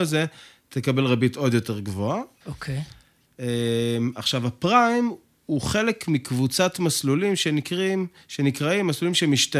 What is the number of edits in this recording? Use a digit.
1